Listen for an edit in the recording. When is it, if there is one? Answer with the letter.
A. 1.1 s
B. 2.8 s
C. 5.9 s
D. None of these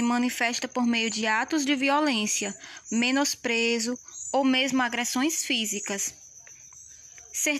B